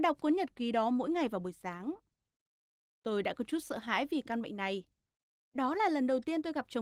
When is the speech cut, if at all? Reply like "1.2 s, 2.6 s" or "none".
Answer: none